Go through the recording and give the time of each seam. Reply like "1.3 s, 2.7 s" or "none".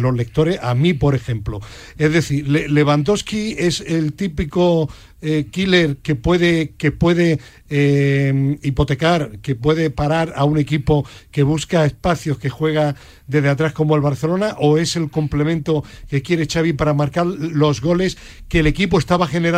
none